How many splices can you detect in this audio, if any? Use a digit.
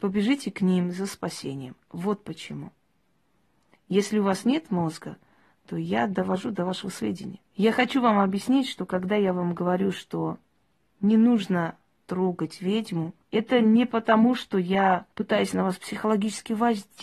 3